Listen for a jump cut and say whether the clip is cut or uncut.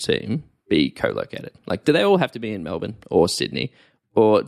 uncut